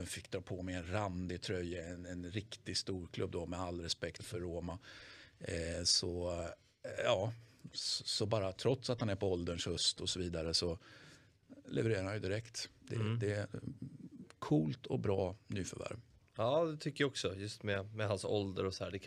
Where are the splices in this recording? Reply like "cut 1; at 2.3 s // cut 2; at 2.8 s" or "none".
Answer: cut 1; at 4.2 s